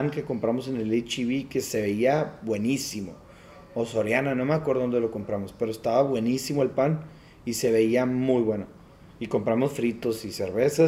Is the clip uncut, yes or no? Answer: no